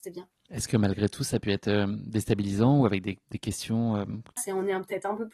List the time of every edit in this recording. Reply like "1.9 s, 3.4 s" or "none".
4.4 s